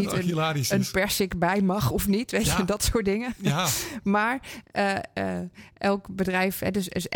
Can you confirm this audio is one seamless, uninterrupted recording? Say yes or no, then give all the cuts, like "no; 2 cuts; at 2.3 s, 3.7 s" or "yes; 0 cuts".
yes; 0 cuts